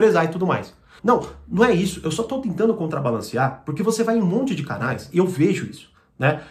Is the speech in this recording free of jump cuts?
no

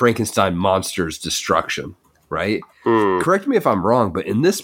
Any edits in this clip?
no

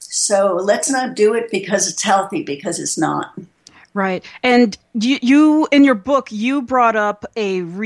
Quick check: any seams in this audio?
no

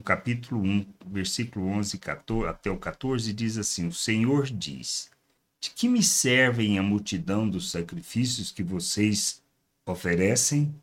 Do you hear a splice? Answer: no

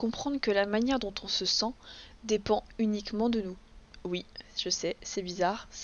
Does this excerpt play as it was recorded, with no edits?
yes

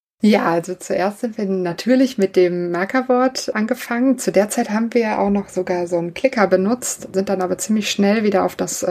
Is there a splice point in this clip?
no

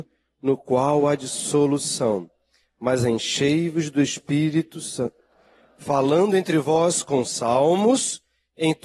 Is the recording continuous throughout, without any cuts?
yes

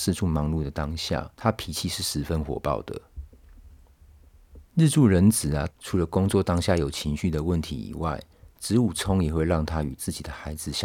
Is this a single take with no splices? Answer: no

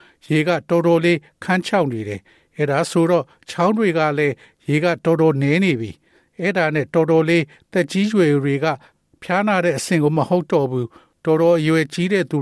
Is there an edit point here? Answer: no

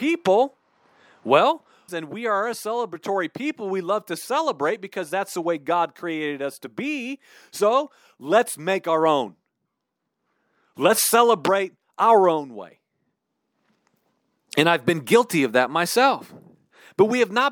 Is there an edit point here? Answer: yes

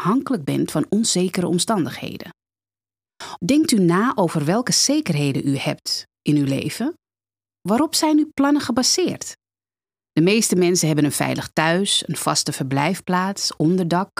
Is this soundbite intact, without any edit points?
no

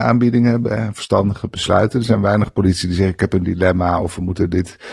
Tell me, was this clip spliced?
no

